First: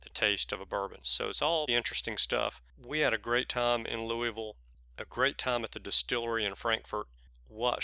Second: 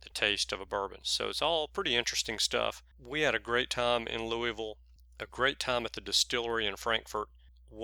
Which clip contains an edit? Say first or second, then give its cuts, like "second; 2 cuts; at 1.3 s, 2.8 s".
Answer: first; 1 cut; at 1.7 s